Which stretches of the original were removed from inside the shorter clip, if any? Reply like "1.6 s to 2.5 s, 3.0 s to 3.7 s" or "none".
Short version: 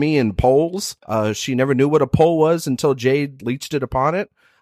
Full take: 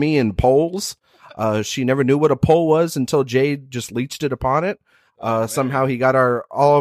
1.0 s to 1.3 s, 3.7 s to 3.9 s